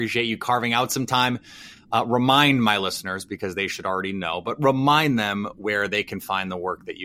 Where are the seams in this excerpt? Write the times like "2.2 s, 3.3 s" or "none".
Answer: none